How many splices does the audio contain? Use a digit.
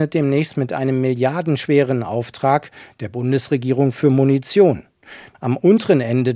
1